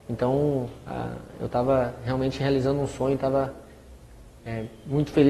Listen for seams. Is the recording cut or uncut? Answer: uncut